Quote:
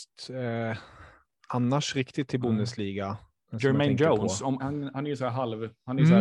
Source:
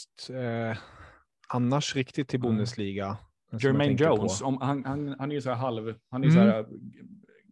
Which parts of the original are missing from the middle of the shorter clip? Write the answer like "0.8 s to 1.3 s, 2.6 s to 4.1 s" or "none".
4.6 s to 4.8 s